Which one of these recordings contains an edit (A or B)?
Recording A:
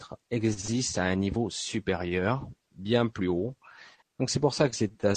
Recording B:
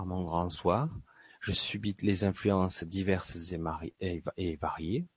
A